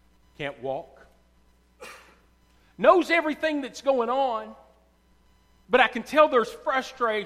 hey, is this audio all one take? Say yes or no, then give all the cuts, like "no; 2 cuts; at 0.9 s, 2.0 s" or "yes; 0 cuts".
yes; 0 cuts